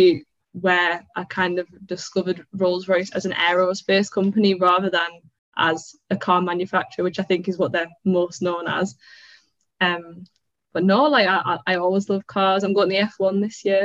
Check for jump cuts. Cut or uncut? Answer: uncut